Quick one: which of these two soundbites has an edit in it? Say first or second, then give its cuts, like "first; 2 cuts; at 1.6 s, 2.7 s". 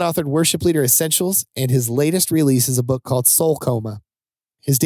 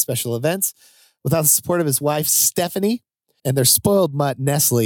second; 1 cut; at 3.4 s